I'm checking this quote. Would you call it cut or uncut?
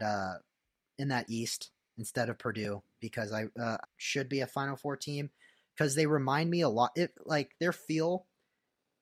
cut